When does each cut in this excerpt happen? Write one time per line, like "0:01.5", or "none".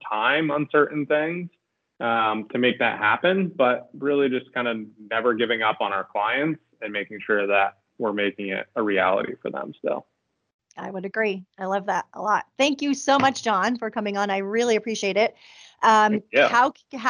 0:10.6